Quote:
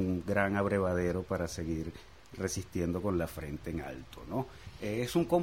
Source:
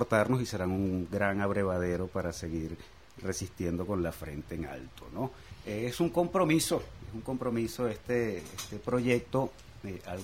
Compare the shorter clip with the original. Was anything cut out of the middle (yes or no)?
no